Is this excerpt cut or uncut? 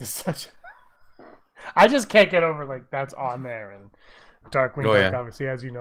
uncut